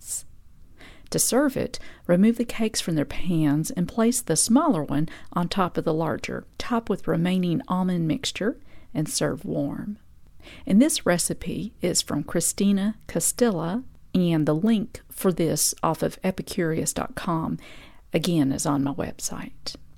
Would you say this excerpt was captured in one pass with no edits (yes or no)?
yes